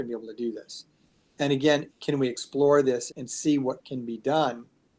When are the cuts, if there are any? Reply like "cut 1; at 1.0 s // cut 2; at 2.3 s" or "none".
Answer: cut 1; at 1.9 s // cut 2; at 3.1 s